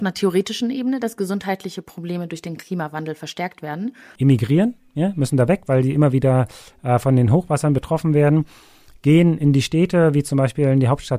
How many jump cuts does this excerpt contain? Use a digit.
1